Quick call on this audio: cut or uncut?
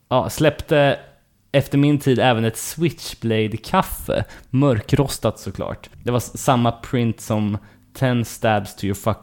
uncut